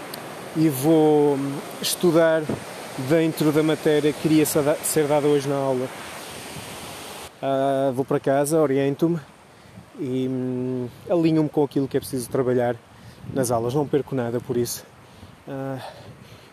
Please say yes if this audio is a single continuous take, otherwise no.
no